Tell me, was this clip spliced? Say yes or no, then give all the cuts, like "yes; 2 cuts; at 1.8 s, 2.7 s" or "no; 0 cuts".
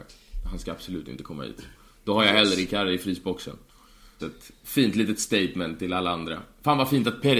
yes; 1 cut; at 4.2 s